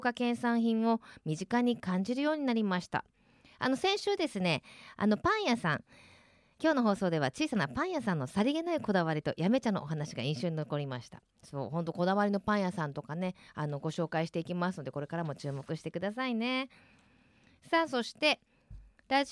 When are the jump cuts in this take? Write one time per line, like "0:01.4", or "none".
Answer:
0:06.6